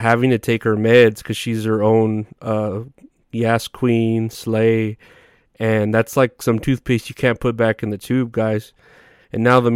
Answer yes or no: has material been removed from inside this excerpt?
no